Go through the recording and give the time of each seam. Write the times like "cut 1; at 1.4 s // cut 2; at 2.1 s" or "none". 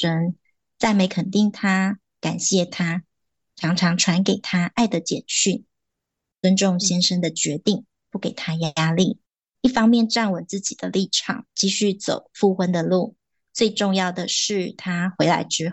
none